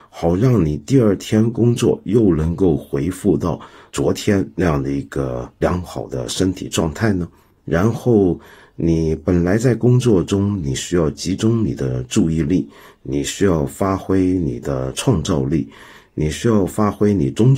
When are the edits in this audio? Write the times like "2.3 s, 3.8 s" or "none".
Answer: none